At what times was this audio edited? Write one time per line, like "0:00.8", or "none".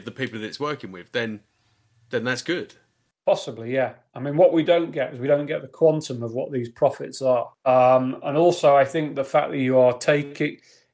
none